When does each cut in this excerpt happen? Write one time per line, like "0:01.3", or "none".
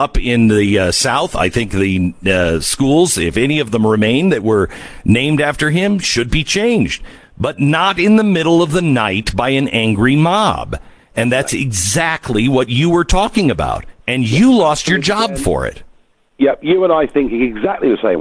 none